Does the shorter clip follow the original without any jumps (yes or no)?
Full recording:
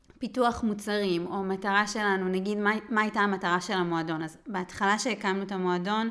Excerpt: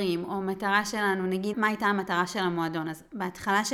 no